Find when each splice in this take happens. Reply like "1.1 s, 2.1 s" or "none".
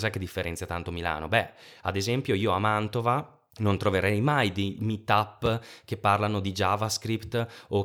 3.5 s